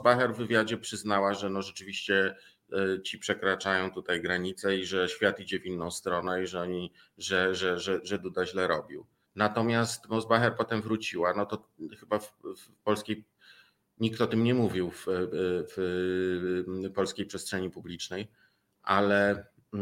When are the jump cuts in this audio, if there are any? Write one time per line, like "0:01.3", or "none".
0:09.3